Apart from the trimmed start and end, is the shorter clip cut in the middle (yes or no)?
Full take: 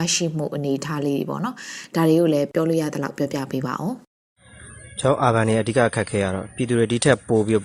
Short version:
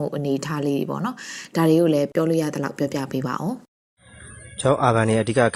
no